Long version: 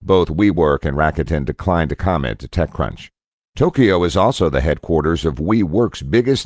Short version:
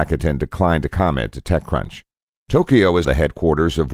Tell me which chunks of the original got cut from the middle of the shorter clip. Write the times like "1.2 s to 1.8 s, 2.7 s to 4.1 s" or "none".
4.1 s to 4.5 s